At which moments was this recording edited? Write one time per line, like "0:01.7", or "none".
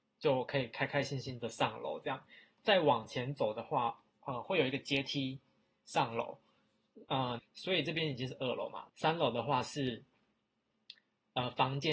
0:04.1
0:07.4
0:08.9